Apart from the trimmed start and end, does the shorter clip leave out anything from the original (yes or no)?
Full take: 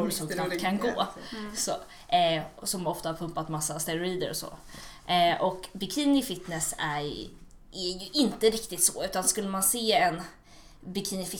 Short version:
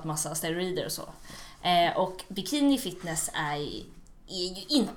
no